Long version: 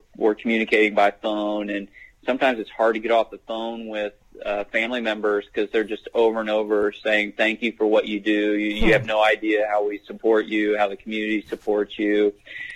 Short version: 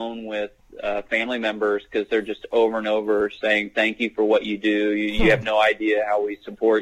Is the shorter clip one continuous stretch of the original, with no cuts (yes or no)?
yes